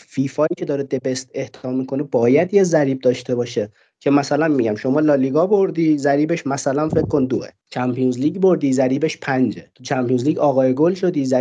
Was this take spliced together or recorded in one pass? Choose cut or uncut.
cut